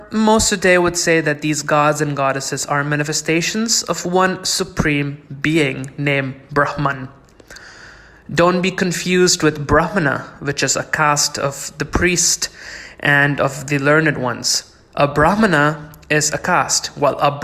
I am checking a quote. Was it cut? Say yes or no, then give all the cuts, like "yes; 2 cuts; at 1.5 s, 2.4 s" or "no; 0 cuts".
no; 0 cuts